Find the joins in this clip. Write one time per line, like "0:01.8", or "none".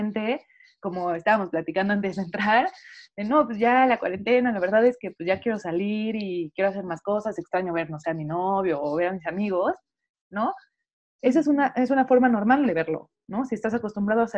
none